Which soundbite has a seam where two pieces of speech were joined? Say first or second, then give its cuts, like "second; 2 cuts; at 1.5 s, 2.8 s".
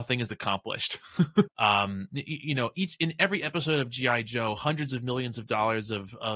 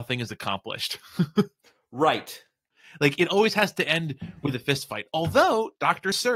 first; 1 cut; at 1.5 s